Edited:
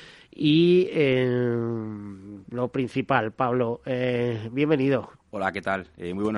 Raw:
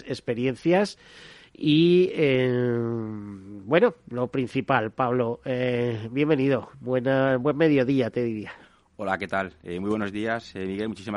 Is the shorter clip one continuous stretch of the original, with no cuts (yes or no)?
no